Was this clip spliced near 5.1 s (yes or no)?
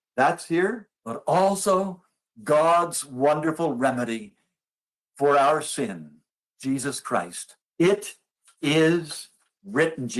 no